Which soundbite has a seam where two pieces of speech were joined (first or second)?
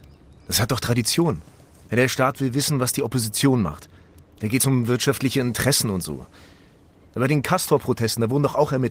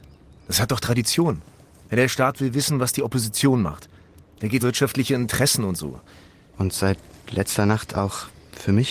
second